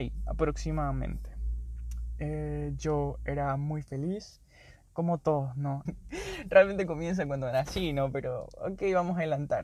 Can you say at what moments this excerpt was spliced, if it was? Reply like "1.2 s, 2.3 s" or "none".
5.9 s